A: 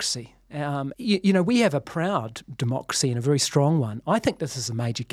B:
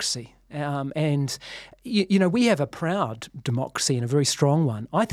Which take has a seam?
A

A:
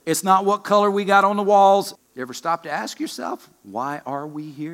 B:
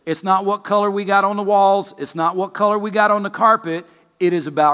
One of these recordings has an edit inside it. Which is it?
A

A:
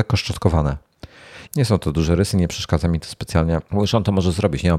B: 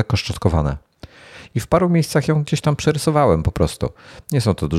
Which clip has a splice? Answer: A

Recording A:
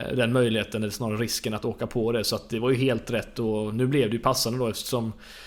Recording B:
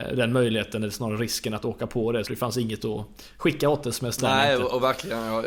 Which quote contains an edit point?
B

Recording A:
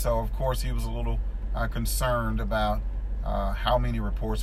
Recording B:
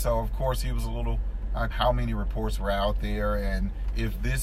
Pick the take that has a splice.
B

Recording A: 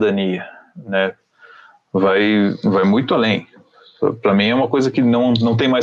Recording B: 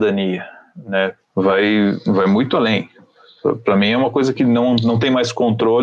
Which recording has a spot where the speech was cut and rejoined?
B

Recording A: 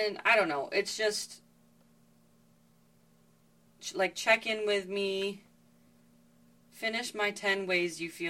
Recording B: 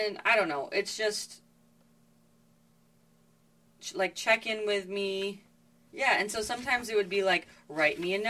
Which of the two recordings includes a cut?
B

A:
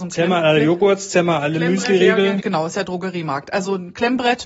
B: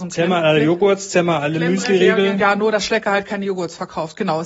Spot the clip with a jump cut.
A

